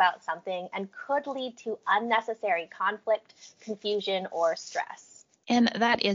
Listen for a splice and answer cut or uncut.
uncut